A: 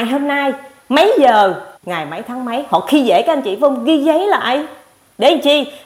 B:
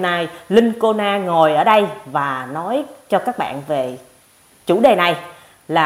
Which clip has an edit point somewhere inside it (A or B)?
A